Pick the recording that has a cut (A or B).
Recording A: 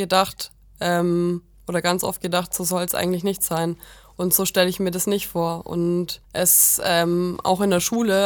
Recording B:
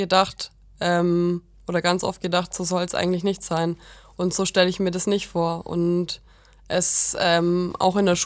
A